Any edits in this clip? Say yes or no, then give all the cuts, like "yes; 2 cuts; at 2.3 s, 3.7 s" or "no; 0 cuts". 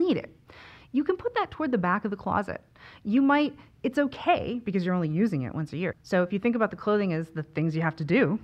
yes; 1 cut; at 5.9 s